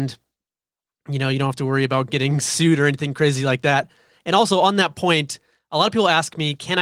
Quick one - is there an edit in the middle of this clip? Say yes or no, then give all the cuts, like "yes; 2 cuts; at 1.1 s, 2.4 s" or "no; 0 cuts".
no; 0 cuts